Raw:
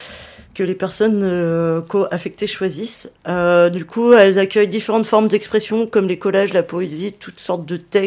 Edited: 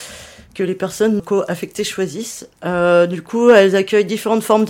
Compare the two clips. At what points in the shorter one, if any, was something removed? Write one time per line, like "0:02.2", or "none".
0:01.2